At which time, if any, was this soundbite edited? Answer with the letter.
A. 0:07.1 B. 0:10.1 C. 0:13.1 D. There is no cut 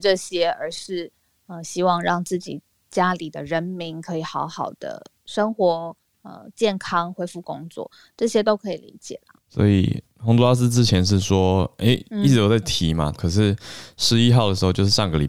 C